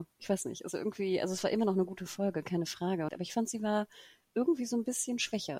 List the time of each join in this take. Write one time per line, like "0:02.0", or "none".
0:03.1